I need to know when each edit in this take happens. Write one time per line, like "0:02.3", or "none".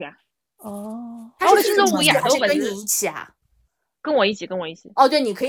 none

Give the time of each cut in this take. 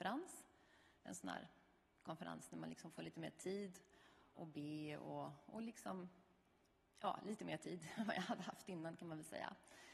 0:04.3

